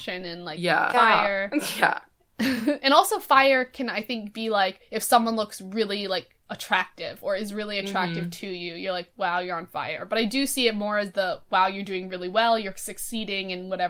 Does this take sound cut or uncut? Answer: cut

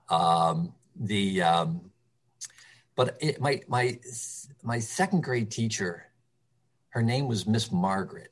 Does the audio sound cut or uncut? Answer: uncut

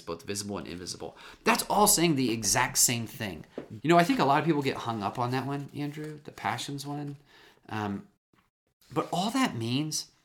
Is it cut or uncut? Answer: cut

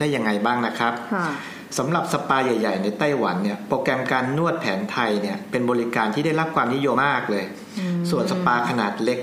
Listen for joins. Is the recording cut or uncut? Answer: cut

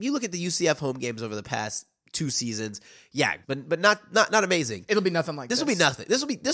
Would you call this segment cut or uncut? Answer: cut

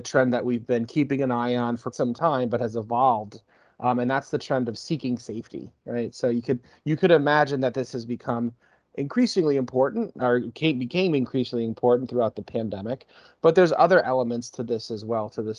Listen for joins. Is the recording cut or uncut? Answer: cut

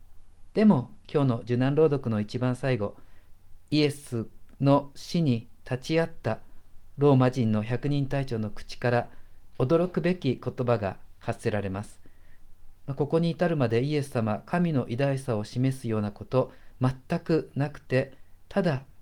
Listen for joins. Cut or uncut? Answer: cut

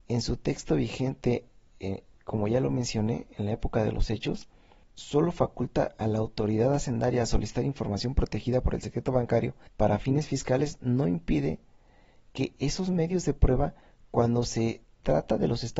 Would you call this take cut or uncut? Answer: cut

